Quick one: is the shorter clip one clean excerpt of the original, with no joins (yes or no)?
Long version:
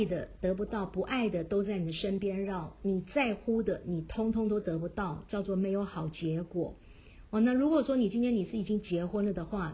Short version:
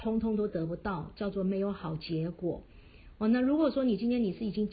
yes